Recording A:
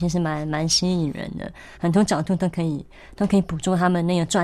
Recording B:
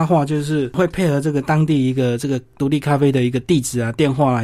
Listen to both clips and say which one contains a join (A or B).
A